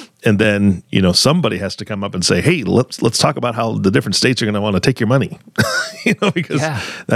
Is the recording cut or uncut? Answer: uncut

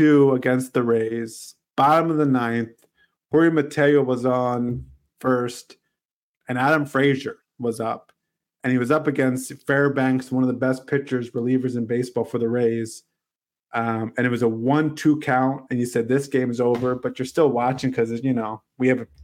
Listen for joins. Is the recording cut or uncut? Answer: uncut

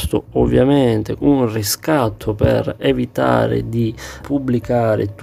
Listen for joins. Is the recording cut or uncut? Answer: cut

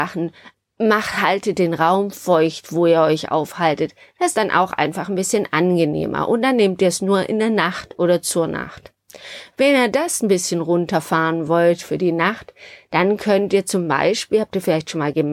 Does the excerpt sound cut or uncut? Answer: uncut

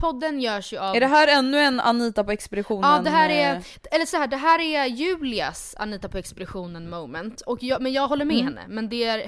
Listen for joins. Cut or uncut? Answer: uncut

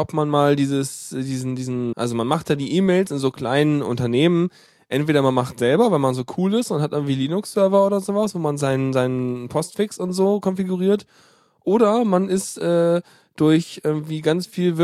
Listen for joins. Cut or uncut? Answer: cut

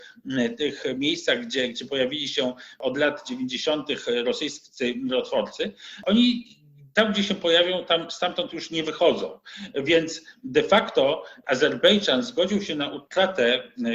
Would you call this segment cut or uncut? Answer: uncut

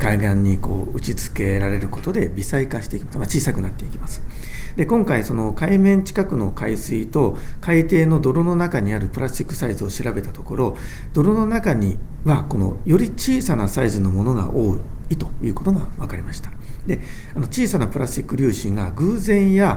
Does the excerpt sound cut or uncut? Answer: uncut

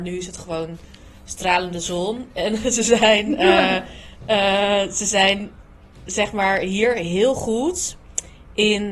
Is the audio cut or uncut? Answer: uncut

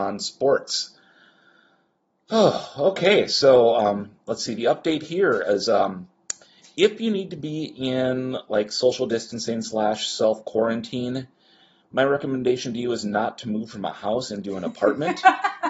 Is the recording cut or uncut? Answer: uncut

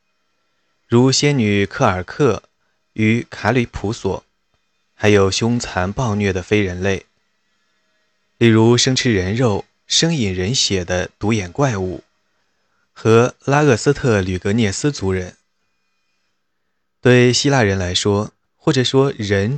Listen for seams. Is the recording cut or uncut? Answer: cut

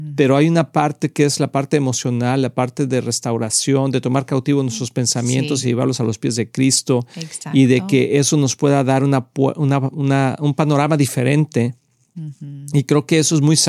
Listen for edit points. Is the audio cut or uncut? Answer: uncut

